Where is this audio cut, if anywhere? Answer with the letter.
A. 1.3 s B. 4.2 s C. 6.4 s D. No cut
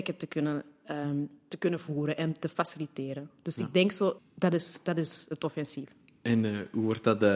B